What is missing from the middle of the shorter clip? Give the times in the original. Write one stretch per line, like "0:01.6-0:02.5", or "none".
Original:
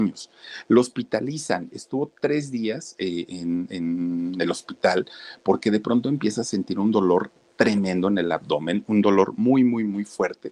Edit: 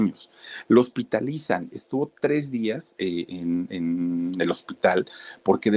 none

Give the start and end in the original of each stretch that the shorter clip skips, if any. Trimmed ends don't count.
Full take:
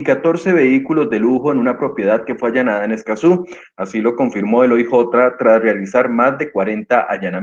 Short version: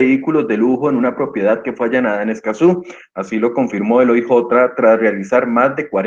none

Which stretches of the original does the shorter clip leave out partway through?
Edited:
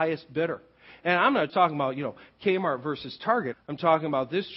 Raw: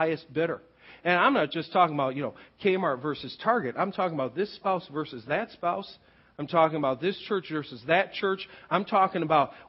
0:01.5-0:01.7
0:03.7-0:06.2

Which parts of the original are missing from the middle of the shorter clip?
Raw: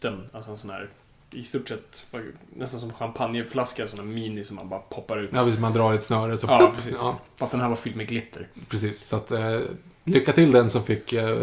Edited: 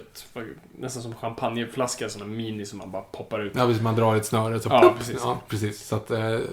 0:07.2-0:08.7

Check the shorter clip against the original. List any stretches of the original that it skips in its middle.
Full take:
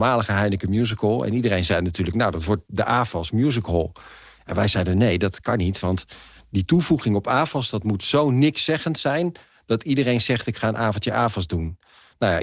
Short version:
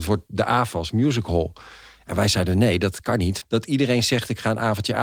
0:05.8-0:09.6

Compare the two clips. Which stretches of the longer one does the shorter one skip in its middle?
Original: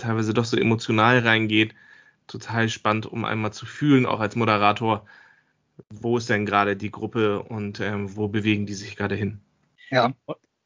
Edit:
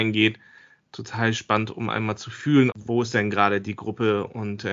0:04.1-0:05.9

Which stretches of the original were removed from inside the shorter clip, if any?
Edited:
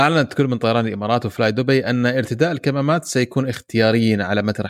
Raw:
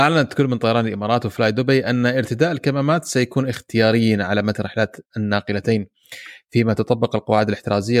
none

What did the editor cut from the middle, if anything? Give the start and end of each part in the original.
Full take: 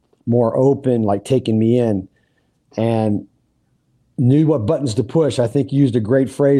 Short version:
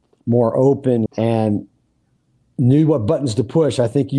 0:01.1-0:02.7

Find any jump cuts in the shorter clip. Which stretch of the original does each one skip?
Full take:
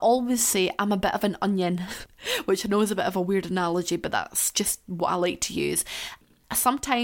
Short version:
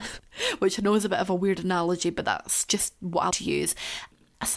0:05.2-0:05.4

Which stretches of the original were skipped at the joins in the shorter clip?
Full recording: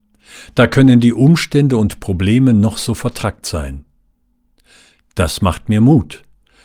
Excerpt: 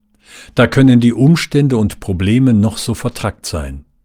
none

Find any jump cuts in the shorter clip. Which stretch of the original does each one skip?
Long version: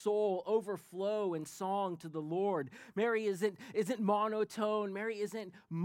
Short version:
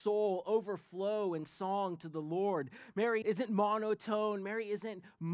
0:03.2-0:03.7

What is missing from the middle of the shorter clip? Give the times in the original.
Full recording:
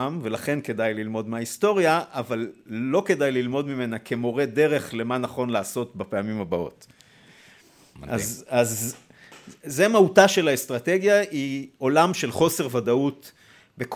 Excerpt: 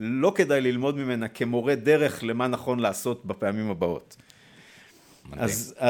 none

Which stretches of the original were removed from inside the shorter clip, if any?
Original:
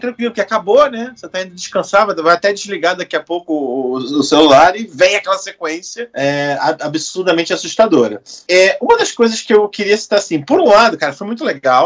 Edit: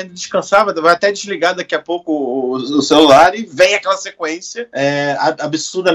none

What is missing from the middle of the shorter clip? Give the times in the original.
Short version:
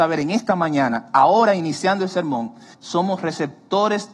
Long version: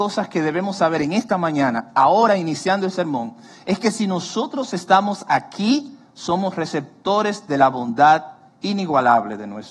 0:03.6-0:06.1

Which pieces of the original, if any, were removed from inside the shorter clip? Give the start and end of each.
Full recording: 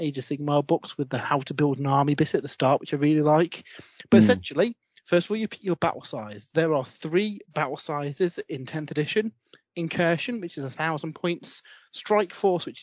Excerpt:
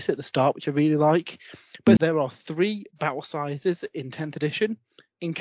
0:04.2-0:06.5

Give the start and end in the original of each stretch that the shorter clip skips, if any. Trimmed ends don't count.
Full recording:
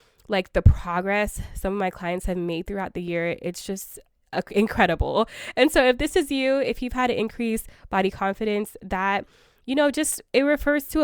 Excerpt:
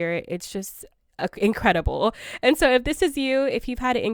none

